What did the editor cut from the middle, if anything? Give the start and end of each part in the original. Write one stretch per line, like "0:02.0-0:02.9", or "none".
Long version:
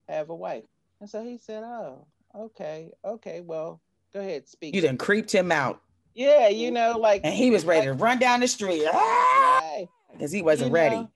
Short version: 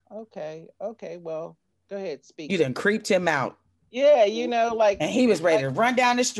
none

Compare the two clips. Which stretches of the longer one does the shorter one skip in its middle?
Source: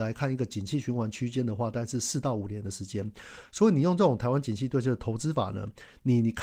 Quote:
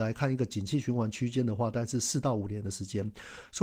none

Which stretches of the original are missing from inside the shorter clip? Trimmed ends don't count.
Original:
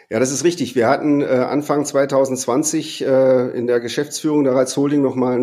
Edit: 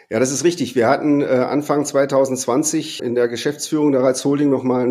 0:03.0-0:03.5

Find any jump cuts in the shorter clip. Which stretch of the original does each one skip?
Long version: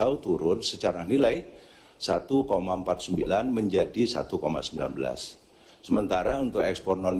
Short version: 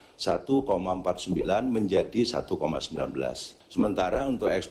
0:05.4-0:05.7

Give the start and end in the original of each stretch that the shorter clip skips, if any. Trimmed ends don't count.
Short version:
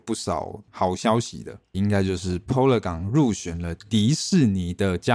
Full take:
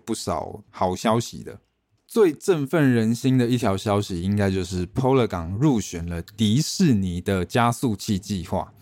0:01.7-0:04.2

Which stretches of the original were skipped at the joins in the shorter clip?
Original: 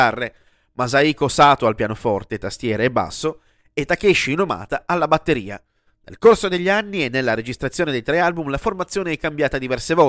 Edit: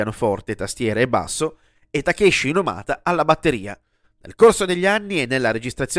none

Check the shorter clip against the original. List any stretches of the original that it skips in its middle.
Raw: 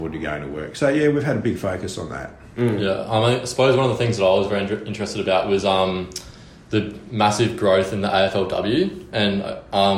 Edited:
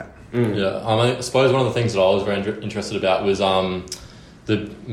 none

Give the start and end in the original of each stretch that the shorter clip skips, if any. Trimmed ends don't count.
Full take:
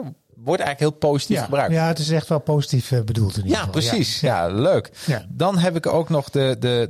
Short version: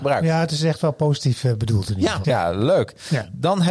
0:03.7-0:04.2

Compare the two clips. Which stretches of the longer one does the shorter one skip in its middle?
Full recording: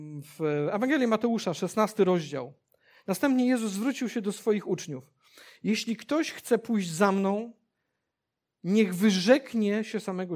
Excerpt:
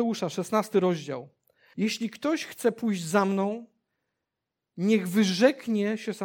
0:03.0-0:05.6

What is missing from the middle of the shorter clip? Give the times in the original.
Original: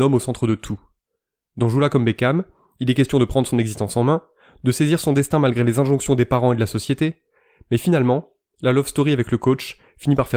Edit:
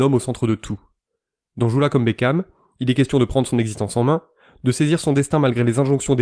none

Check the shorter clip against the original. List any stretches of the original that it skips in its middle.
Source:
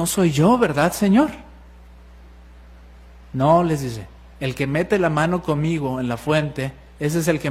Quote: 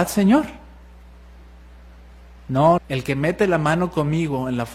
0:03.6-0:04.3

